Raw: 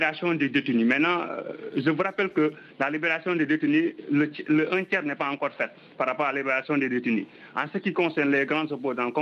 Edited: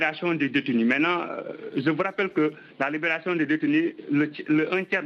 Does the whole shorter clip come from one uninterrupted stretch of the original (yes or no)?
yes